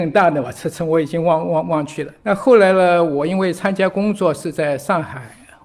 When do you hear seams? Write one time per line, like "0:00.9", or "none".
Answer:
0:02.2